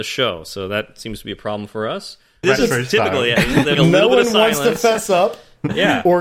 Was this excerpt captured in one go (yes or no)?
no